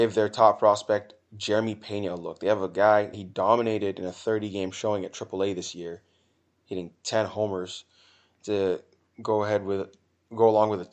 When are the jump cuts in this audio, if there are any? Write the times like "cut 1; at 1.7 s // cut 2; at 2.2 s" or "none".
cut 1; at 3.1 s